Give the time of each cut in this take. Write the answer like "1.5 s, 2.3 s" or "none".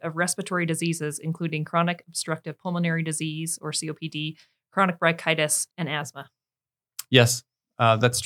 5.7 s

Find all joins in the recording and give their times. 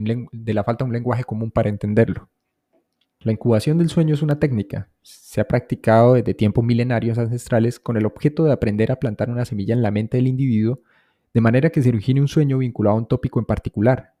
3.2 s

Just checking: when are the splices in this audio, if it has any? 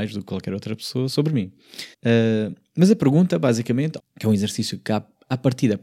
1.9 s, 4.0 s

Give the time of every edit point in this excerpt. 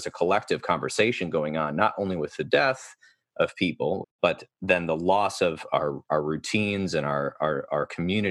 4.0 s

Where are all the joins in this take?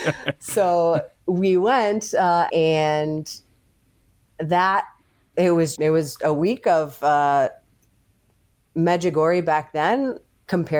2.5 s, 5.7 s

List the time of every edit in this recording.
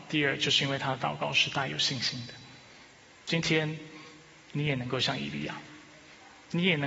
none

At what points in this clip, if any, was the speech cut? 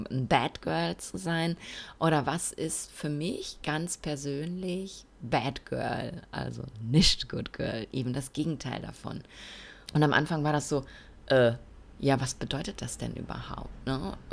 9.9 s

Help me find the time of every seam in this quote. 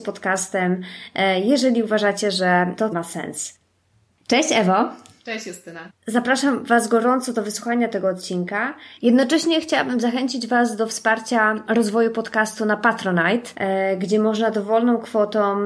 2.9 s, 5.9 s

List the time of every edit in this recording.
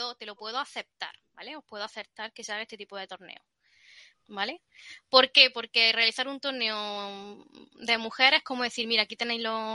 4.1 s

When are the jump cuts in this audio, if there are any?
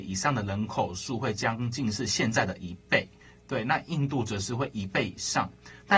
none

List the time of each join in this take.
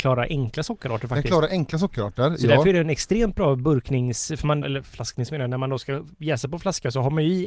4.6 s

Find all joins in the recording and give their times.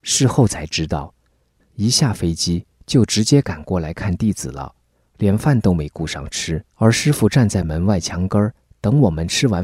1.5 s, 6.7 s

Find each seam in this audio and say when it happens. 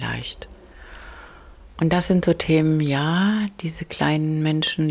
none

